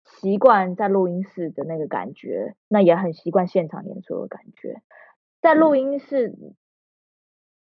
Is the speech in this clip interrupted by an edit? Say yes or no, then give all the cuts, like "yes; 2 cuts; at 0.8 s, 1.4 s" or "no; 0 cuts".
no; 0 cuts